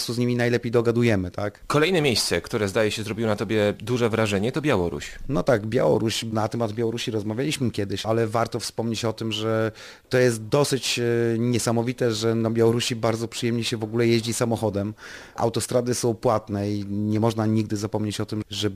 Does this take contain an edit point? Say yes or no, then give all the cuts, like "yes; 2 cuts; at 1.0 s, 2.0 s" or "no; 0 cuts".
no; 0 cuts